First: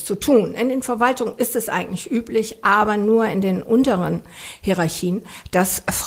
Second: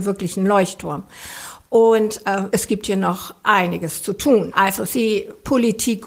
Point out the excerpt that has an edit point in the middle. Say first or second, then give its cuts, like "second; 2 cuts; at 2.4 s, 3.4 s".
second; 2 cuts; at 2.5 s, 4.5 s